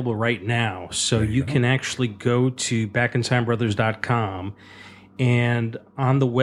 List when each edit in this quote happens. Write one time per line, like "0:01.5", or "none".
none